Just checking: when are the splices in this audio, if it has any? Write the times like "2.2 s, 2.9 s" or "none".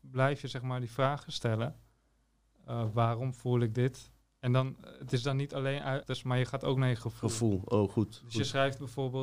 6.0 s